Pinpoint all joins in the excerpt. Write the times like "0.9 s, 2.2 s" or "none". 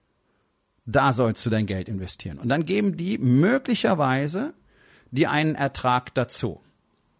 none